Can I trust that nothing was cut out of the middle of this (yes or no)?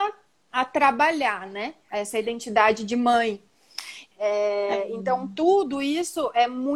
no